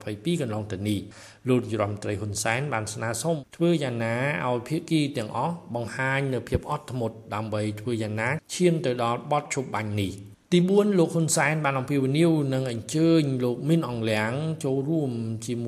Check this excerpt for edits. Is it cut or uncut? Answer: cut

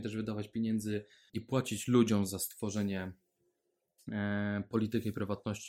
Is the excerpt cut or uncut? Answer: cut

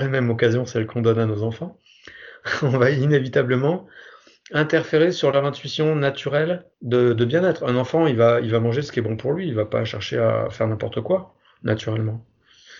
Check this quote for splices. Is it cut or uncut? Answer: cut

